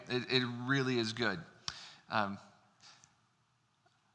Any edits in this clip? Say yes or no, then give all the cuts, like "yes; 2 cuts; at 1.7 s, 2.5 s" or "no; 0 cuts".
yes; 1 cut; at 2.0 s